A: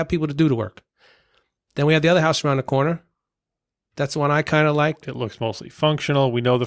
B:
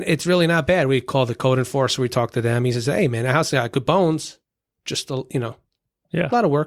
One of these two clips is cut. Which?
A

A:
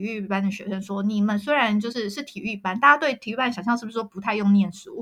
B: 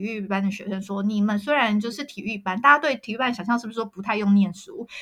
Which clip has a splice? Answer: B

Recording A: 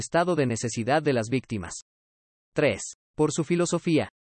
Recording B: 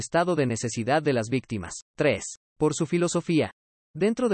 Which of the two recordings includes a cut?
B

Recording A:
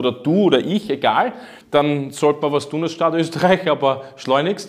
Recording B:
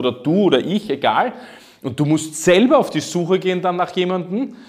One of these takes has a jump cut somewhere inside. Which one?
A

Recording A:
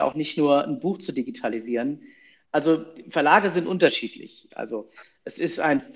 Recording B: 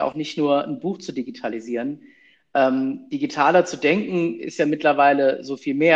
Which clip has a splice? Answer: A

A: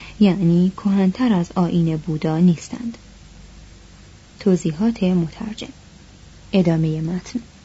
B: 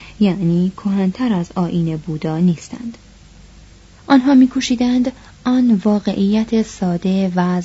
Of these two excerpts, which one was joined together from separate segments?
B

